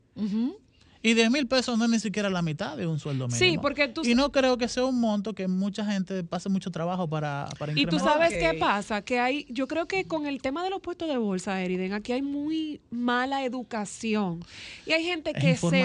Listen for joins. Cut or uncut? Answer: uncut